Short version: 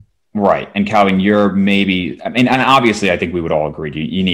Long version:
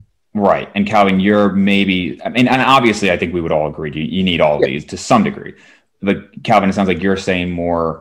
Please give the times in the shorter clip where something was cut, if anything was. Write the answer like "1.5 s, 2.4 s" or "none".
none